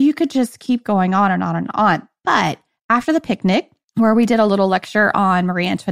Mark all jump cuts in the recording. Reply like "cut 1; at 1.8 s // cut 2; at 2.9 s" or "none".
none